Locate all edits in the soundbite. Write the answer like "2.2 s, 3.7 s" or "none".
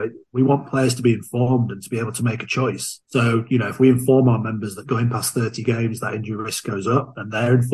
3.0 s